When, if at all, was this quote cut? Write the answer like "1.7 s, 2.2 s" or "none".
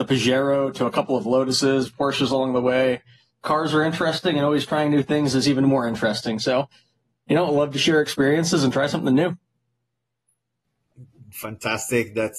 3.3 s